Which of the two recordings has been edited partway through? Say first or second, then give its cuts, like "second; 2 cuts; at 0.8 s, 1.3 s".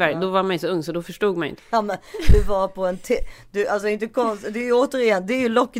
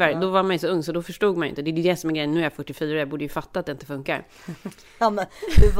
first; 1 cut; at 1.6 s